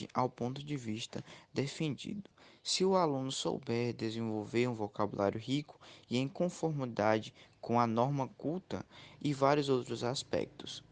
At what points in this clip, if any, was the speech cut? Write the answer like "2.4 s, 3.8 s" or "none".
none